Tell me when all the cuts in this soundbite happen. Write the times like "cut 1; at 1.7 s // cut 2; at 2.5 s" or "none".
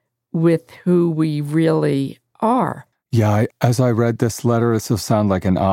cut 1; at 2.9 s